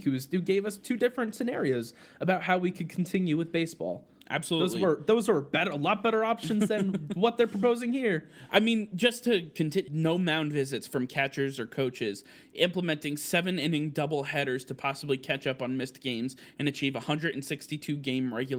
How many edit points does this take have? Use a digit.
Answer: 1